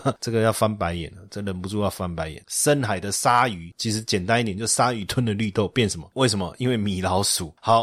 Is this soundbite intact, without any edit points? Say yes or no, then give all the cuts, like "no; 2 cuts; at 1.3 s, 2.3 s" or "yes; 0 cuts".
no; 3 cuts; at 2.4 s, 3.7 s, 6.1 s